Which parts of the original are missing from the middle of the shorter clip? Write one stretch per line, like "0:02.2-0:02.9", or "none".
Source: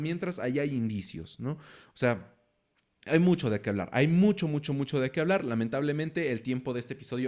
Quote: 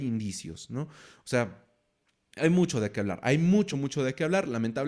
0:04.4-0:04.7